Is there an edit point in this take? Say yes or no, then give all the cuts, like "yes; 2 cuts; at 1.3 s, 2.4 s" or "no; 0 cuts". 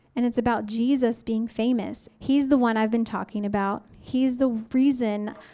yes; 1 cut; at 2.1 s